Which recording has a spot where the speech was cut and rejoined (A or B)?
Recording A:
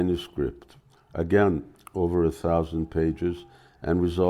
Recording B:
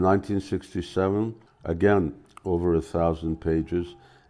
B